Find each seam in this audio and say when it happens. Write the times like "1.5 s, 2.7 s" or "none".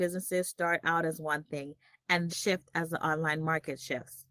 2.3 s